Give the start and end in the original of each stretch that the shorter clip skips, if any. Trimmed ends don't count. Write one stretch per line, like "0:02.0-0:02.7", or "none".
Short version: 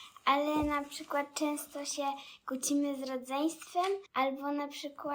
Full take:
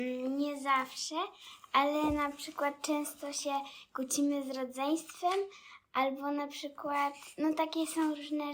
0:05.5-0:05.9